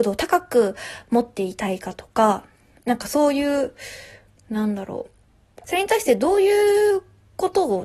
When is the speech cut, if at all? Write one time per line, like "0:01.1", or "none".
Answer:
0:05.6